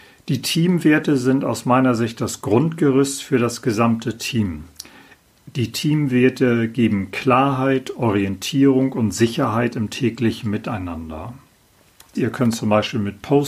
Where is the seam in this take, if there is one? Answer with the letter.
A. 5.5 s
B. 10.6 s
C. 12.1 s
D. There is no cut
C